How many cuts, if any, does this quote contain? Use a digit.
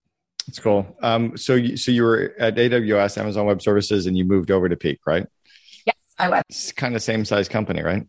1